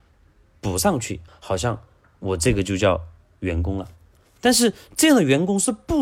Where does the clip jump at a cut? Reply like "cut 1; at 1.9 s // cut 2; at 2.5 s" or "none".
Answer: cut 1; at 1.3 s